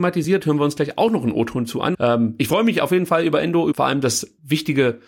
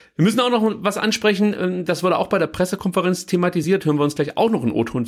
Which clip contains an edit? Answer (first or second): first